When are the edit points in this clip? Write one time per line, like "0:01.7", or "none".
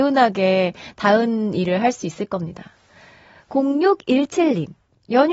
none